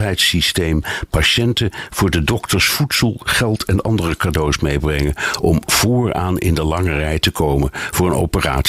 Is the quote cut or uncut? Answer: uncut